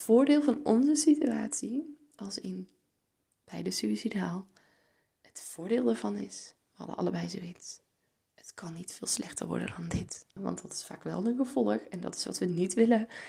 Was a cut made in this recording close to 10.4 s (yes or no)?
yes